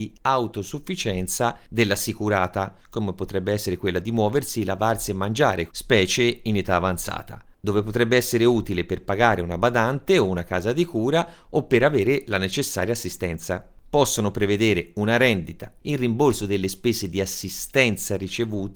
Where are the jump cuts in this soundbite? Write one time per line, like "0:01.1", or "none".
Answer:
0:05.7
0:15.8

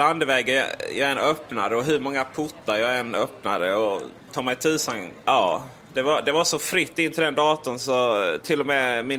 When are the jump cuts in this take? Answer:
none

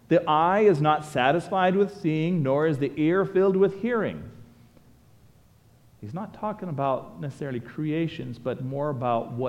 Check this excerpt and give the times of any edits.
0:05.8

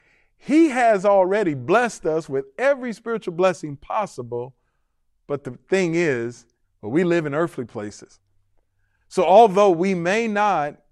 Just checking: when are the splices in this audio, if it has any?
0:06.6

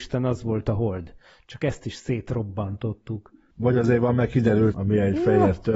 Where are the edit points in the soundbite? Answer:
0:03.6
0:04.7

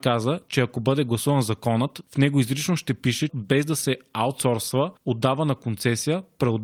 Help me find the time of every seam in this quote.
0:03.3

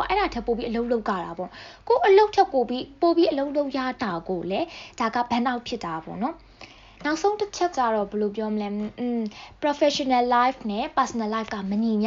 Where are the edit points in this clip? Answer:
0:07.7

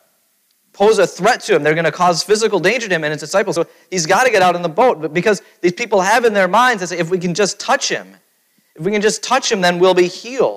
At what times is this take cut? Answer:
none

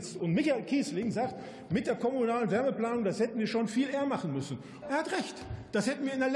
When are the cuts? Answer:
0:04.8

